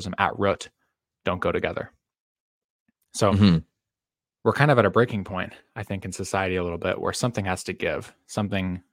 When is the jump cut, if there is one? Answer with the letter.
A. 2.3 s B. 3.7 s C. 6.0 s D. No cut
D